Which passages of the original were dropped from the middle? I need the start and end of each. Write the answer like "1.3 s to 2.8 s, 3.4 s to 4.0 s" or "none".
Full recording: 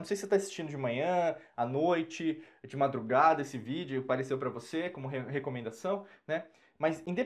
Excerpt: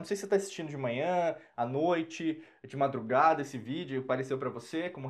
none